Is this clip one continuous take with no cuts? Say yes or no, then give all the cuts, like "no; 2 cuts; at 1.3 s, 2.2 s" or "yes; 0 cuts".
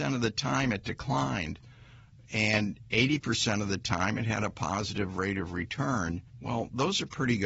no; 1 cut; at 6.3 s